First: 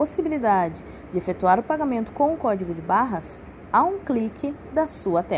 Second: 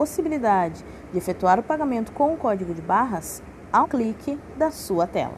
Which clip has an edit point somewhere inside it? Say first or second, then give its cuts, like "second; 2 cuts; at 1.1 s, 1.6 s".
second; 1 cut; at 3.8 s